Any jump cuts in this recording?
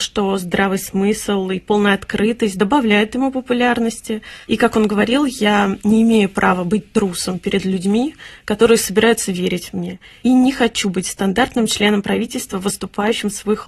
no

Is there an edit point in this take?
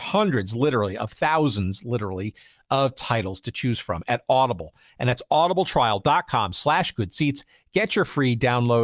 no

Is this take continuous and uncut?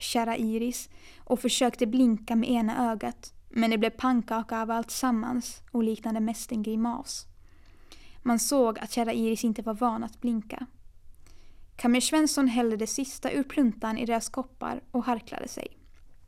yes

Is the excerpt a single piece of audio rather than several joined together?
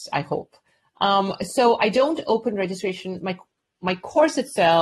yes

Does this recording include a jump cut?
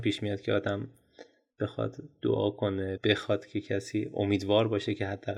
yes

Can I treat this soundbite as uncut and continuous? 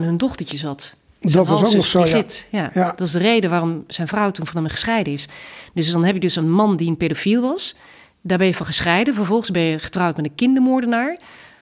yes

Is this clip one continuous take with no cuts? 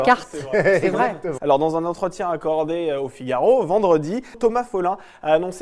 no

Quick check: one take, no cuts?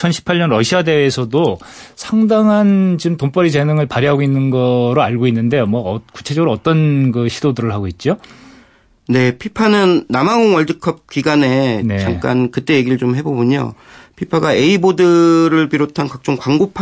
yes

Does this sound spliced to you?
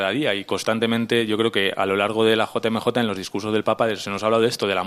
no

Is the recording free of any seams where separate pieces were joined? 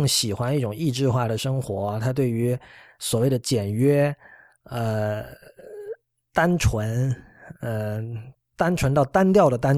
yes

